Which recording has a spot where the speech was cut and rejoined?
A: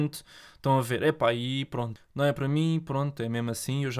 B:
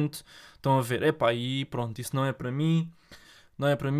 A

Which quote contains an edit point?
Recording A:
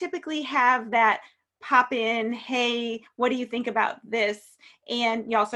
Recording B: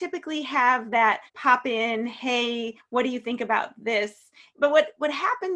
B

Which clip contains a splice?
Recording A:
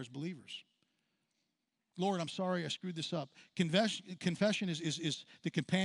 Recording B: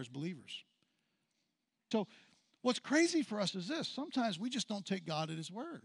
B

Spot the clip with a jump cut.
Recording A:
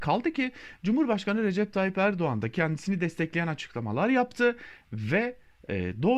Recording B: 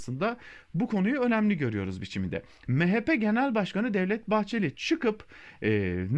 B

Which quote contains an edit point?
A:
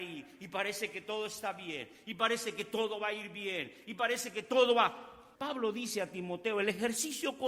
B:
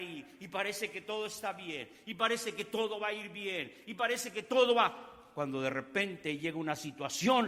A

